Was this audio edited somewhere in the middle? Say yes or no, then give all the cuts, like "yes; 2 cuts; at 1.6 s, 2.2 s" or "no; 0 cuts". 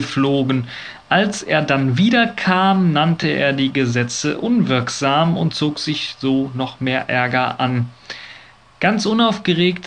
no; 0 cuts